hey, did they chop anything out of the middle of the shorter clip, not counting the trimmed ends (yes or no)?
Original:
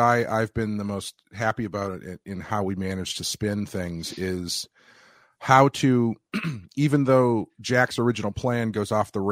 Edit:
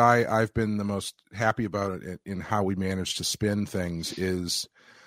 no